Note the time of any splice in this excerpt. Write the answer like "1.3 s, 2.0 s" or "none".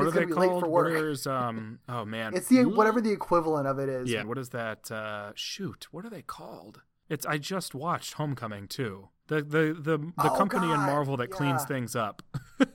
2.3 s, 4.2 s